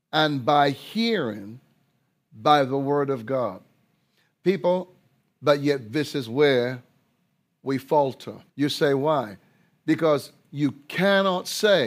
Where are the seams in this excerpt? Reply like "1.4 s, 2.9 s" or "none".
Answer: 5.2 s, 8.5 s